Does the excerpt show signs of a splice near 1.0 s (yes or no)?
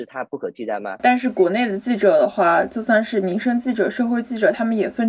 yes